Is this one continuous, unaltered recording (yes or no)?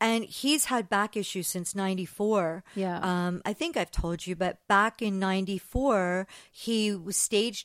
yes